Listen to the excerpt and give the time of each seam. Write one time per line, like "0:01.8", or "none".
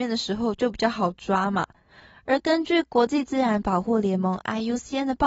none